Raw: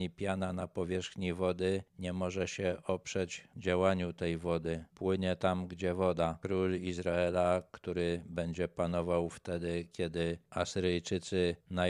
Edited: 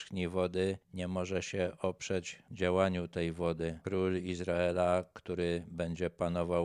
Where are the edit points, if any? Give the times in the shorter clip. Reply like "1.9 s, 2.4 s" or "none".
3.8 s